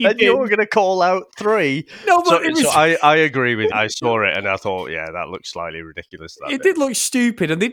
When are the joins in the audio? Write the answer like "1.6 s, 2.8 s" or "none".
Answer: 3.7 s